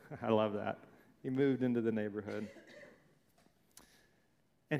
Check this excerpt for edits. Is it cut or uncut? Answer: uncut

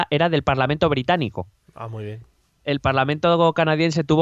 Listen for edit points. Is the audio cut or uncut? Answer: uncut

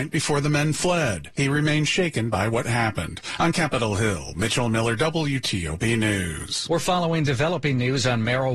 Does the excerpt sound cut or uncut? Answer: uncut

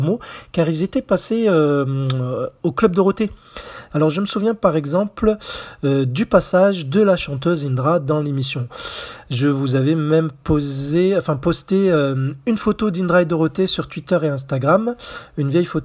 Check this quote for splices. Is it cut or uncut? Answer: cut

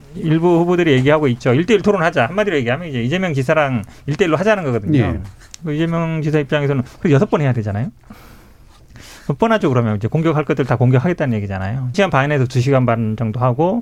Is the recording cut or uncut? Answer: cut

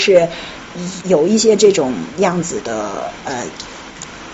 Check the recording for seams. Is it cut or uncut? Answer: cut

